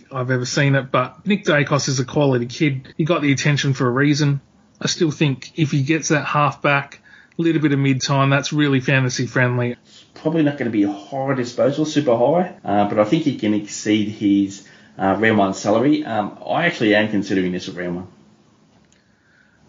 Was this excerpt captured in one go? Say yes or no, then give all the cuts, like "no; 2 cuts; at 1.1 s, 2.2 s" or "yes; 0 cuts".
no; 3 cuts; at 2.9 s, 9.7 s, 12.6 s